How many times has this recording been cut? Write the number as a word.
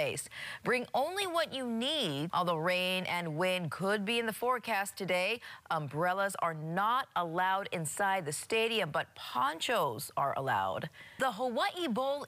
two